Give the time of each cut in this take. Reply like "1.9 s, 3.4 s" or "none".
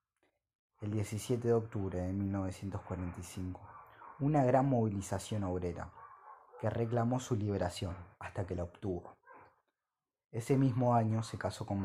8.1 s

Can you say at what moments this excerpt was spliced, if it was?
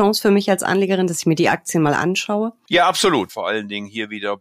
3.3 s

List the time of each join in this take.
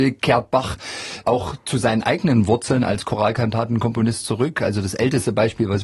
none

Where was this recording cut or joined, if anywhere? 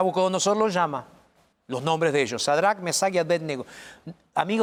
1.5 s

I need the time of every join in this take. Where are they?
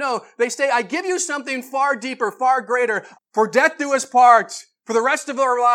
3.1 s

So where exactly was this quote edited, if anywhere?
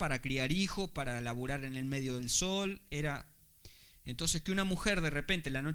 none

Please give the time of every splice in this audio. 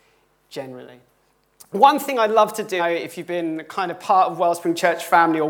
2.8 s

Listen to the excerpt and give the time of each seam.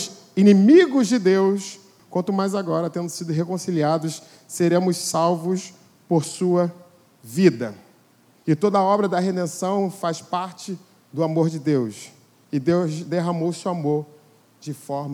2.0 s, 8.4 s

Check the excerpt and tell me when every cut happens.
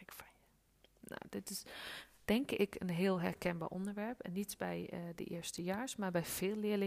none

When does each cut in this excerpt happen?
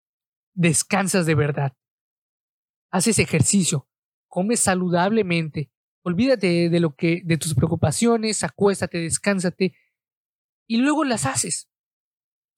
5.8 s

